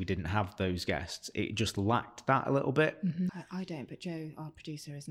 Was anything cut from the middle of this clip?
yes; 1 cut; at 3.3 s

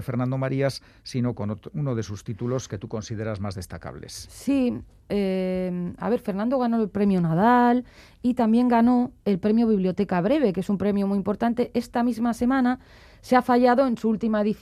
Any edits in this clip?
no; 0 cuts

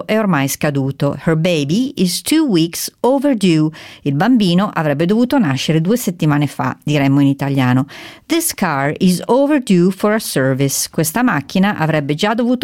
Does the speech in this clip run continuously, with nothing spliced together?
yes; 0 cuts

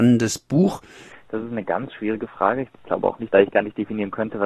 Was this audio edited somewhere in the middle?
yes; 2 cuts; at 1.1 s, 3.3 s

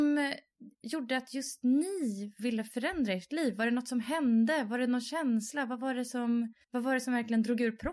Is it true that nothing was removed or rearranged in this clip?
no; 1 cut; at 6.6 s

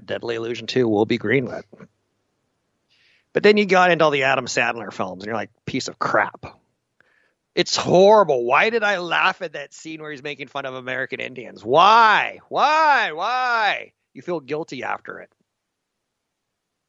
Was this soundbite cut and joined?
no; 0 cuts

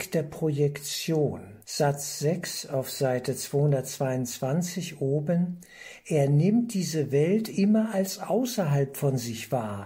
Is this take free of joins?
no; 1 cut; at 1.6 s

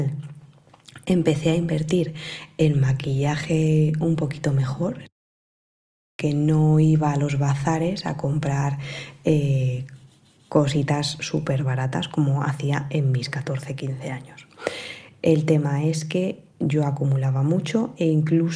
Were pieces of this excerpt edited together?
no; 0 cuts

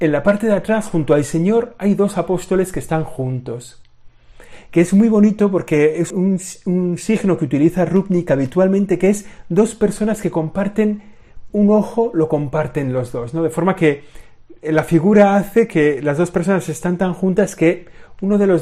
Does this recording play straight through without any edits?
no; 2 cuts; at 6.1 s, 11.5 s

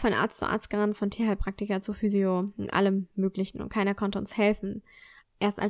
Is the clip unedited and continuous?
yes; 0 cuts

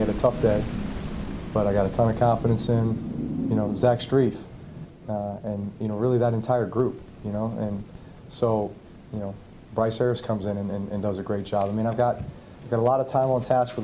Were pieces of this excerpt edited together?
no; 0 cuts

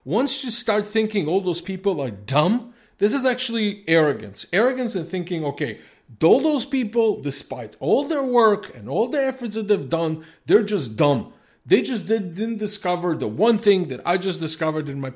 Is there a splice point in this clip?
no; 0 cuts

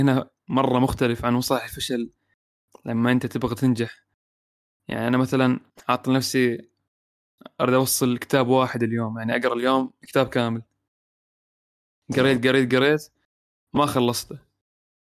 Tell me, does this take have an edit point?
yes; 1 cut; at 12.7 s

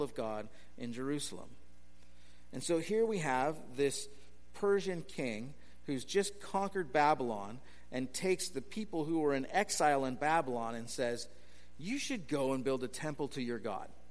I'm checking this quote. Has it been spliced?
no; 0 cuts

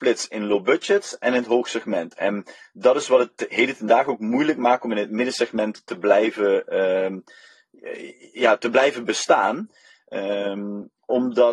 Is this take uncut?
yes; 0 cuts

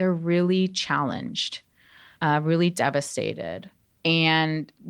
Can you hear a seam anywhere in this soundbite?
no; 0 cuts

